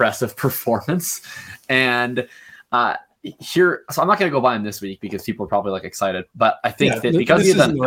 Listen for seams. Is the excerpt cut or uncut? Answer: uncut